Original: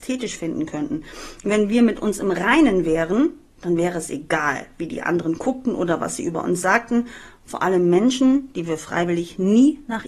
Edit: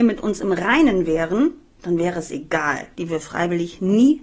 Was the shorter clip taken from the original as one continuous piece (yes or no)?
no